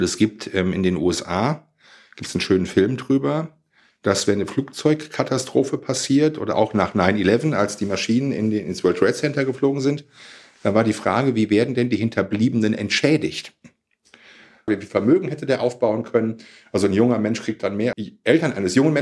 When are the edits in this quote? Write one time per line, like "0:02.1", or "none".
0:14.7
0:17.9

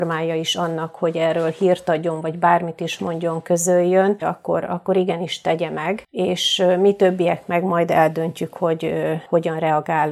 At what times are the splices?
0:04.2

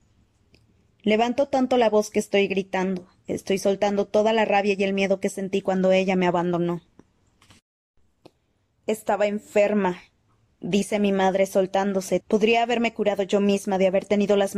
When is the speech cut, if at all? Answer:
0:12.2

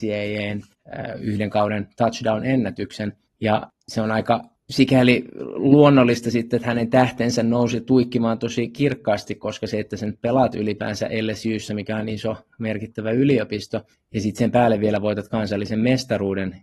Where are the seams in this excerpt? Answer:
none

